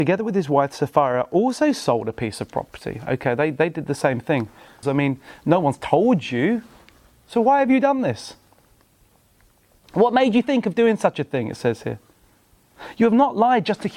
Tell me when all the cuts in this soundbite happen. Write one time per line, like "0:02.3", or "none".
0:04.8